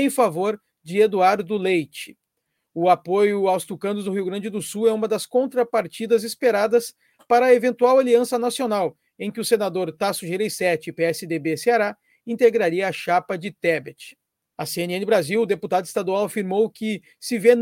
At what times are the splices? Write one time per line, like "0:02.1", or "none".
0:14.5

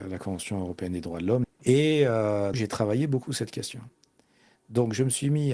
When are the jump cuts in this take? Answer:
0:01.4
0:02.5

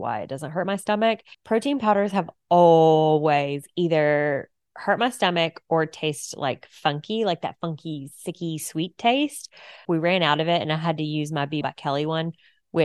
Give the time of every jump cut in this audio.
0:01.3
0:09.9
0:11.6

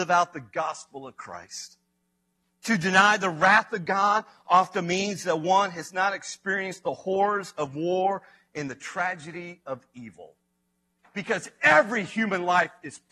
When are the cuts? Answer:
0:11.0

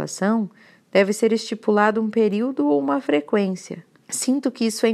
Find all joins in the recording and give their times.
0:04.0

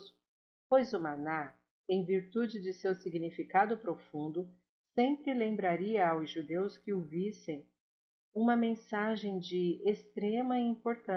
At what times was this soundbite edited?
none

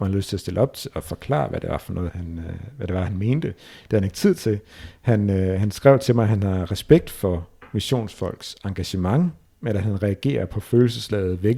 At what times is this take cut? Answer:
0:02.1

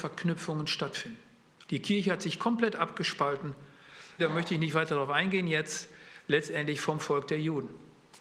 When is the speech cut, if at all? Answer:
0:01.7
0:04.2

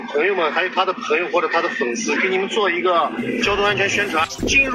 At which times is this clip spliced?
0:02.2

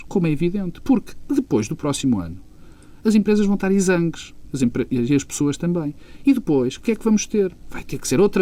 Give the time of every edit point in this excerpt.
none

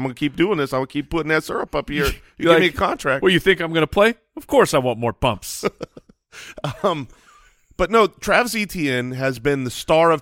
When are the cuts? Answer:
none

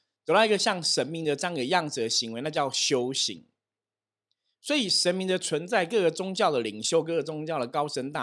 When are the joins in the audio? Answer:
none

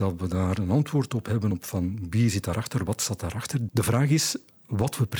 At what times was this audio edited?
none

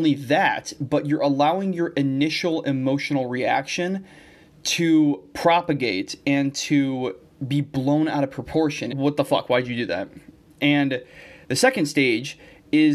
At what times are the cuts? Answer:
0:08.9

